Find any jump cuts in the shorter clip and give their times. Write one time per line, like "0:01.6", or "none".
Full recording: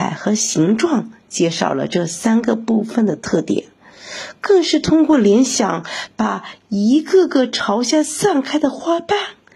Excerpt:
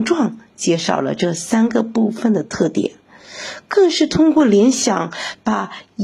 none